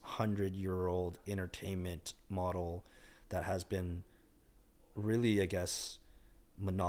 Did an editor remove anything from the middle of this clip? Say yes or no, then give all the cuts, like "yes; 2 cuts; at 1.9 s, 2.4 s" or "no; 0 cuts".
no; 0 cuts